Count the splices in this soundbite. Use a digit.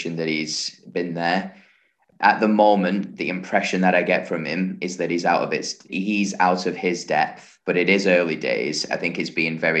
3